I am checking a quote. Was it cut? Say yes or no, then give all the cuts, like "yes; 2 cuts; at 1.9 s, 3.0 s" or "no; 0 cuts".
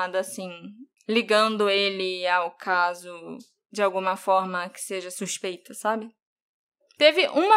no; 0 cuts